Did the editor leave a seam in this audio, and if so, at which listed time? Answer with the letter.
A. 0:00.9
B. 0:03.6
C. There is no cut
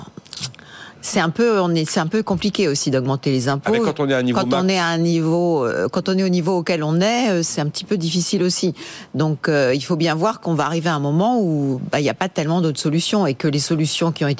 C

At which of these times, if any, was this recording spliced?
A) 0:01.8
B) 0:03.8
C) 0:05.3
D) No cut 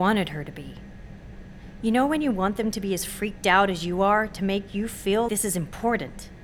C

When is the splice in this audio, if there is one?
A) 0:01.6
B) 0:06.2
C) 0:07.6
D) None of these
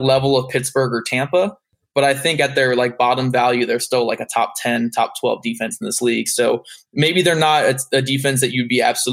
D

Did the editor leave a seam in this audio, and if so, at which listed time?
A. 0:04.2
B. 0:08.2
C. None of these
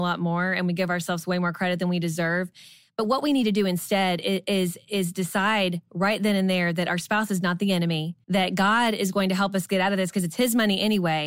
B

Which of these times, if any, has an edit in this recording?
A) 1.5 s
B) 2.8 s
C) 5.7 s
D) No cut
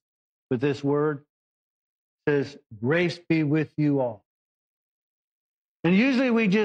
C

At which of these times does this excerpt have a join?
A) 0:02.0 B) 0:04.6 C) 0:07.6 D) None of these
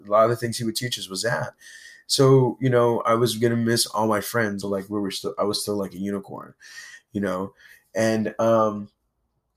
B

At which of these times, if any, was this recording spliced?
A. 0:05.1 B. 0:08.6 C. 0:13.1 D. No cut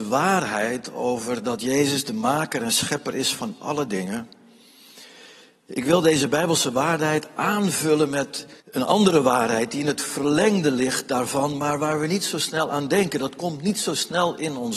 B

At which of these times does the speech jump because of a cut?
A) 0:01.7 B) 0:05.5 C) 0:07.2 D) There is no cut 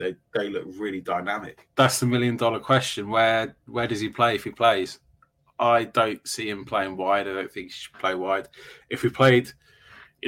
A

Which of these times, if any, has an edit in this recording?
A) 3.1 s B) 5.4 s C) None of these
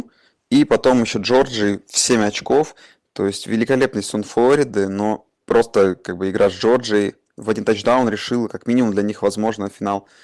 B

